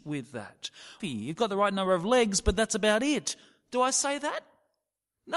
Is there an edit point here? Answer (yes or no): yes